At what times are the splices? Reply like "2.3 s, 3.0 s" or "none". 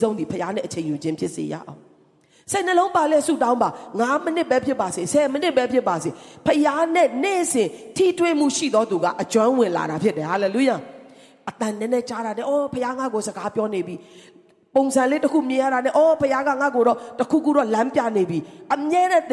none